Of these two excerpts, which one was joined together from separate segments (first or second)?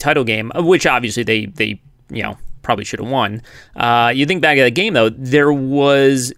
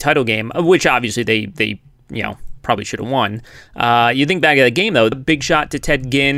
second